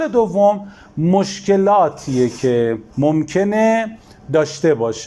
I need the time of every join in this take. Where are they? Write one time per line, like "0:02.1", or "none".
0:02.9